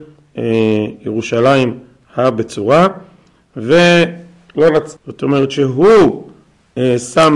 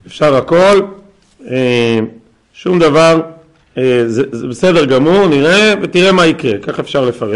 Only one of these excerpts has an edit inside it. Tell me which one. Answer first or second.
first